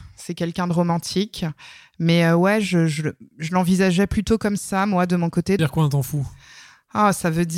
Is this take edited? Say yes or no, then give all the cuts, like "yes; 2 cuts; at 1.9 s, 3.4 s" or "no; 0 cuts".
yes; 1 cut; at 5.6 s